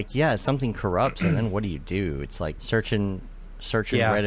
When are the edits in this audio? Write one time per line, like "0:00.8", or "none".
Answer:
0:02.6